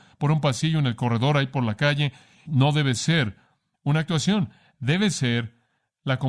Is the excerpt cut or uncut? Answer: cut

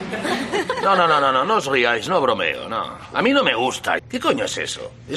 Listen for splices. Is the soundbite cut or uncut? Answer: cut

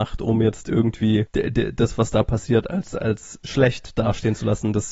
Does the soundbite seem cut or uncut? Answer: uncut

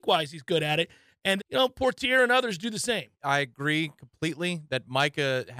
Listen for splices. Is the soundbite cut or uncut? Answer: cut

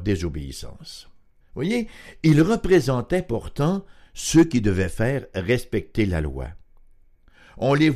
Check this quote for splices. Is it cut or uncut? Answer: cut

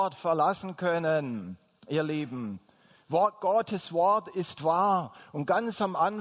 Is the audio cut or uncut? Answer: uncut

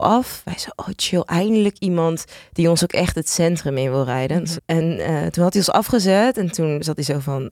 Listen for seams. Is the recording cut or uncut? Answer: cut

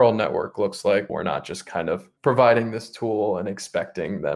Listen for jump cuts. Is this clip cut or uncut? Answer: cut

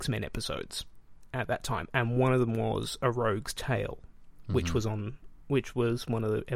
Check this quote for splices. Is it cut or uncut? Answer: uncut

